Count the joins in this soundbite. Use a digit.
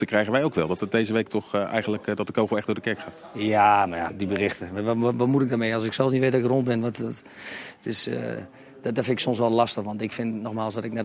1